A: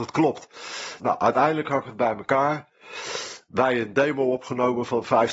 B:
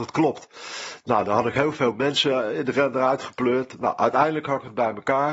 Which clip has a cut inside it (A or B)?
A